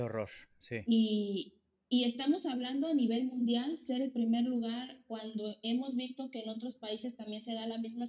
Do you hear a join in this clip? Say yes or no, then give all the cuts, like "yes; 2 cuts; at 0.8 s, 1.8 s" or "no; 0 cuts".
no; 0 cuts